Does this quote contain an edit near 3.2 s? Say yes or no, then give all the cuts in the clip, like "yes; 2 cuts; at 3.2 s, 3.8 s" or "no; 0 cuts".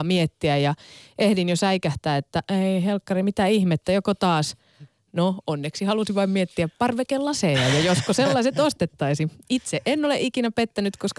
no; 0 cuts